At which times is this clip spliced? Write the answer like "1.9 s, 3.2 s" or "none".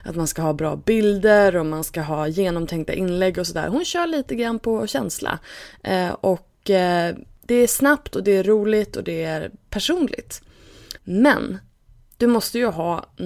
11.0 s